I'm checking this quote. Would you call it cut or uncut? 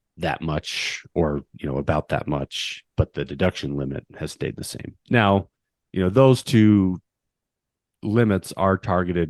uncut